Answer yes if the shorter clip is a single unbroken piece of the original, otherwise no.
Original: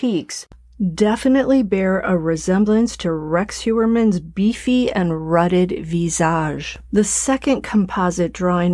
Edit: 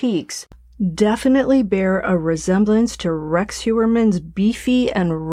yes